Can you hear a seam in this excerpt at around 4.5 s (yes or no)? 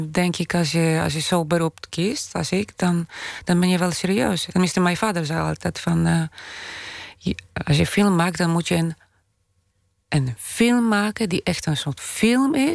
yes